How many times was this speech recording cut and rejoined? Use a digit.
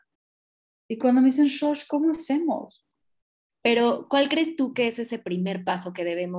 1